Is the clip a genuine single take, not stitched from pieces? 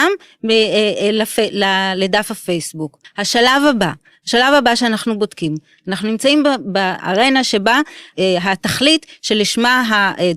no; 1 cut; at 3.0 s

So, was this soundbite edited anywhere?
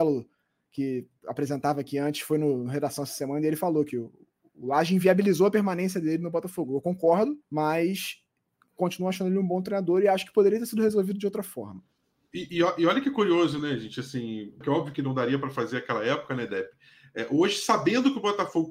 yes; 2 cuts; at 7.4 s, 14.6 s

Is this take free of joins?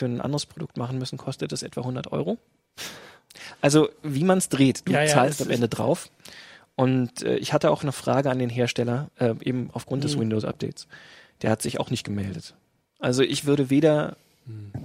yes; 0 cuts

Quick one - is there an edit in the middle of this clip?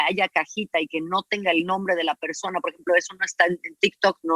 no; 0 cuts

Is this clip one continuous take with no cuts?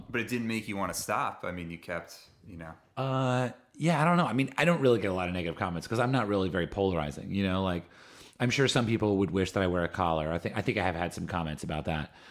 yes; 0 cuts

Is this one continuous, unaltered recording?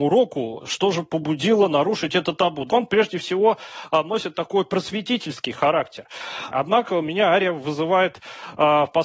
no; 2 cuts; at 2.7 s, 6.5 s

